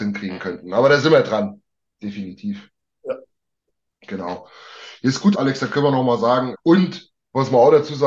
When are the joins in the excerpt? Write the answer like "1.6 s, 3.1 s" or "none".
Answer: 5.3 s, 6.5 s